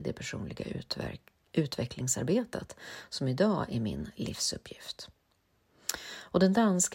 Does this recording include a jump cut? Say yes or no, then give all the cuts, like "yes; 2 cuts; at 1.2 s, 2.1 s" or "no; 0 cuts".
no; 0 cuts